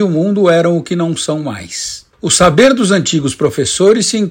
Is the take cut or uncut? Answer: cut